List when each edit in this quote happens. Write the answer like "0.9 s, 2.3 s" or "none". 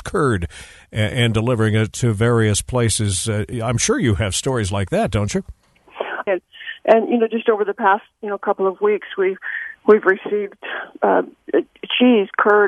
6.3 s